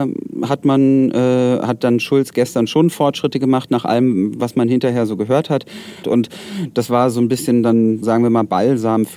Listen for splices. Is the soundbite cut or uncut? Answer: cut